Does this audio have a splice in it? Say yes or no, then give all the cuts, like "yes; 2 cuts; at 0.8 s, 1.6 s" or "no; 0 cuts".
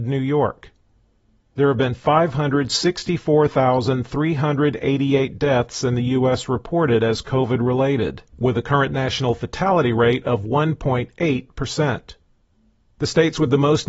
no; 0 cuts